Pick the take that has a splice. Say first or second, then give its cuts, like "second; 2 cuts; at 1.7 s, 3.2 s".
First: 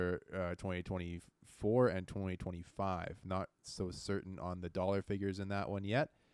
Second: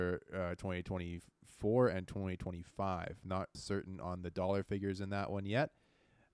second; 1 cut; at 3.5 s